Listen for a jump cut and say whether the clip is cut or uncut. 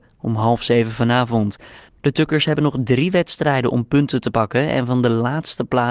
uncut